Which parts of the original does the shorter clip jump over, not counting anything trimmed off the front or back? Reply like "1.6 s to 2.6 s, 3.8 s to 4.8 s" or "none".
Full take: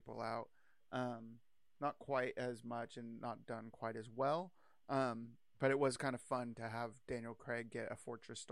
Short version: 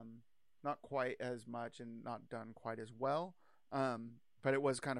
none